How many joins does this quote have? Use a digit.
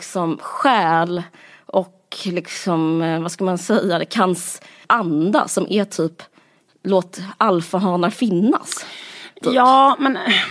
0